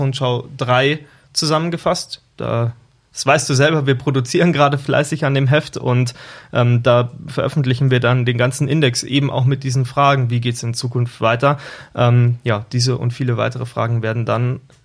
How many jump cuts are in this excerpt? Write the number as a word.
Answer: zero